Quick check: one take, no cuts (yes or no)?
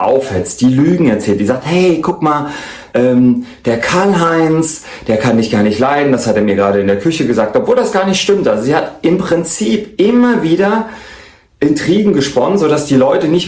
yes